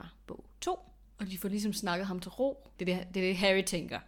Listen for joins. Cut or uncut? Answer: cut